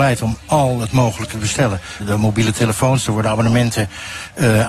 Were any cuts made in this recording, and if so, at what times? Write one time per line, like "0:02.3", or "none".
0:02.0